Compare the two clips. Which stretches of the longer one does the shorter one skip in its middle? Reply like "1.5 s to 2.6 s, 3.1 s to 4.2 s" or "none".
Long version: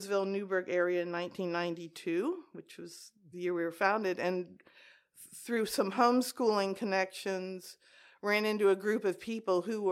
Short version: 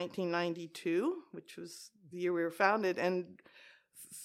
none